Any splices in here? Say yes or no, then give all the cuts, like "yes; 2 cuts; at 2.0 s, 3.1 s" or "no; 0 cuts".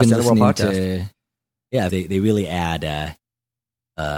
yes; 1 cut; at 1.9 s